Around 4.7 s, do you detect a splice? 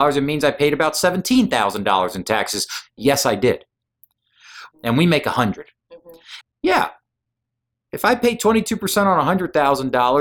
yes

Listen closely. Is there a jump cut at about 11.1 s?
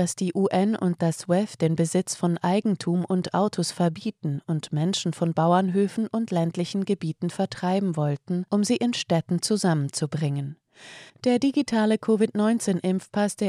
yes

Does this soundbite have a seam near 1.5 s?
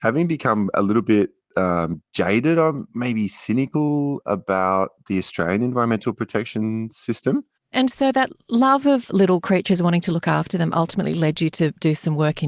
no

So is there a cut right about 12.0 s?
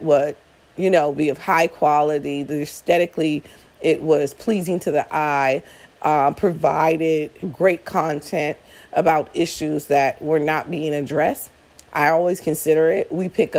no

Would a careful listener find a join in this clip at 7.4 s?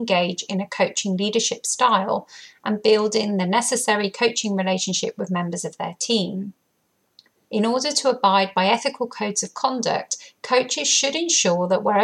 yes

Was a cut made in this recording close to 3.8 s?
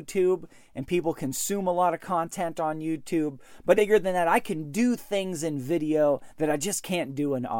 yes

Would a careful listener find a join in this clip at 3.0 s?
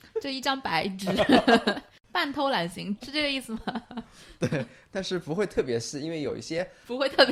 yes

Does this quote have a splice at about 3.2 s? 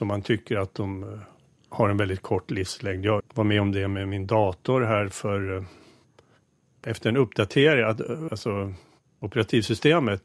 yes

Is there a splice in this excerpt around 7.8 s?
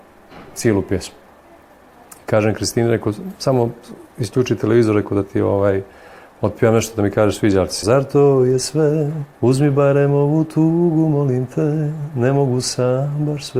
yes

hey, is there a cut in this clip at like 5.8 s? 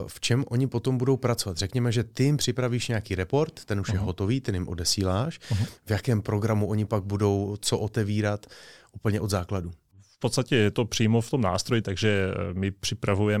yes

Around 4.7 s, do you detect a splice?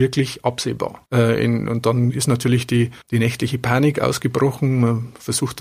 no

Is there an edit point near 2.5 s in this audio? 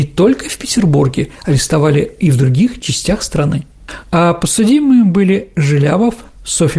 no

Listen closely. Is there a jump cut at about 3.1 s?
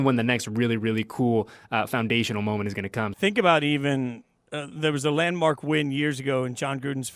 yes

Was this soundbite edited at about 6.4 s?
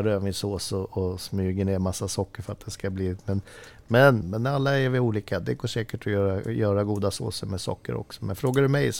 no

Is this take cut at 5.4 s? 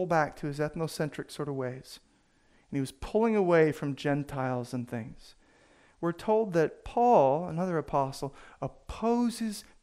no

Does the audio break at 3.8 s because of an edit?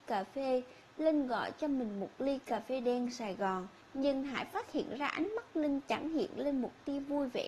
yes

